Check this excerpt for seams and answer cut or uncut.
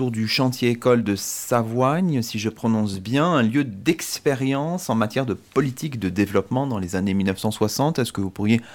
uncut